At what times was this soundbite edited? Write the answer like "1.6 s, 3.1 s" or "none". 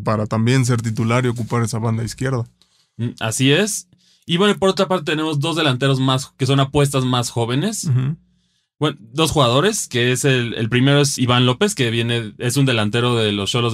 11.2 s